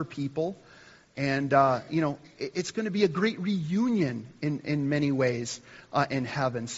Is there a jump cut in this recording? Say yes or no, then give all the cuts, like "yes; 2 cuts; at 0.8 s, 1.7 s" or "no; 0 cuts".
no; 0 cuts